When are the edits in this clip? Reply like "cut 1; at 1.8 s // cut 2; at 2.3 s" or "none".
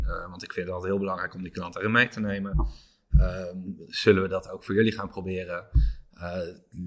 none

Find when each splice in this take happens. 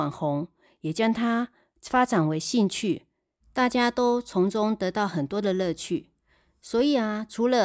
none

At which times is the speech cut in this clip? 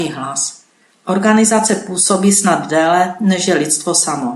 cut 1; at 1.0 s

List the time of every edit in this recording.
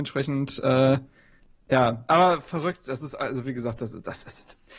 none

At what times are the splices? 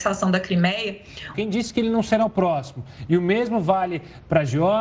cut 1; at 1.3 s

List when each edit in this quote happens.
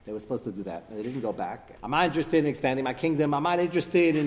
cut 1; at 1.8 s

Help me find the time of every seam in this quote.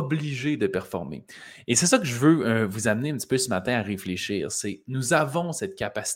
none

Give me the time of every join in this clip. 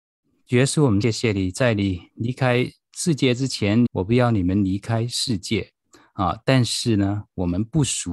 cut 1; at 1.0 s // cut 2; at 3.9 s

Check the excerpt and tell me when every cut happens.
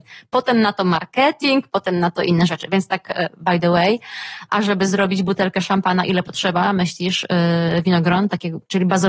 cut 1; at 4.5 s

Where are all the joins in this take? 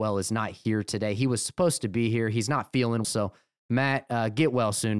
cut 1; at 3.0 s

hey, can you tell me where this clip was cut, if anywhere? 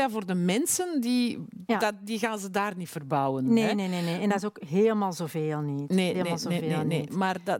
cut 1; at 6.1 s

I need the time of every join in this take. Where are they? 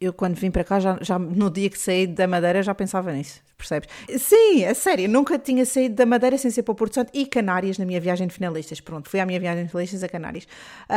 cut 1; at 4.1 s // cut 2; at 9.0 s

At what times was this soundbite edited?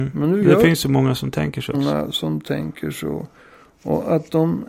cut 1; at 1.7 s

